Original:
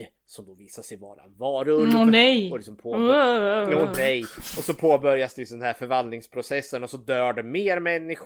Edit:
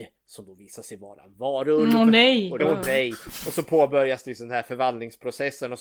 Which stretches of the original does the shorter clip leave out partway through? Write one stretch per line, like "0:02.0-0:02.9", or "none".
0:02.6-0:03.7